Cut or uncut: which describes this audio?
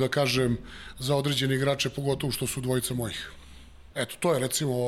cut